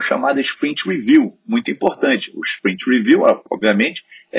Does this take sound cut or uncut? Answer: uncut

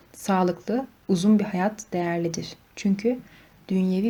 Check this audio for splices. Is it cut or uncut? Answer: uncut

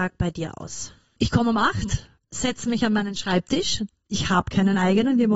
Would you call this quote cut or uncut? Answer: uncut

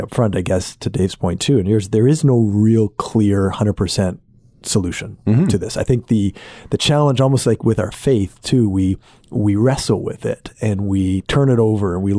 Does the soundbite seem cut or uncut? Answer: uncut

